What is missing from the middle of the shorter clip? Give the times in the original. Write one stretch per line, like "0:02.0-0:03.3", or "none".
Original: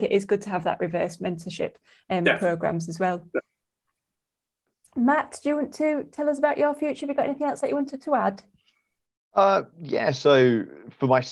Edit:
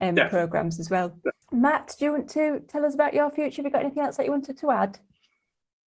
0:03.5-0:04.9